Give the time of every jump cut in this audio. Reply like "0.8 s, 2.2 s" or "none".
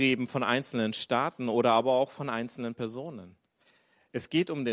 none